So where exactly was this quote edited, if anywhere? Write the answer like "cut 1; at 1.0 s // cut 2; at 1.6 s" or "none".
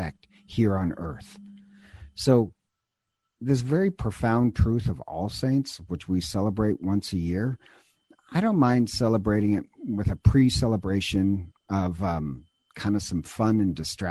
none